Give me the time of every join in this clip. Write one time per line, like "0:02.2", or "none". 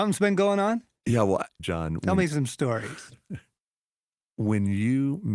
0:01.6